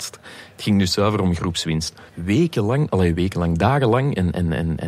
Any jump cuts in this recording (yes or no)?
yes